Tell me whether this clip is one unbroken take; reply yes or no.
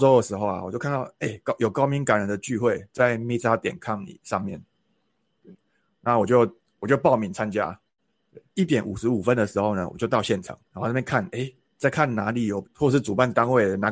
no